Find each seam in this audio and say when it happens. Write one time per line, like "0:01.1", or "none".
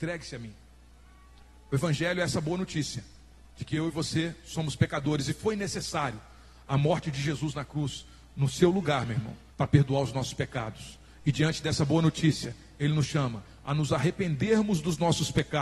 0:09.5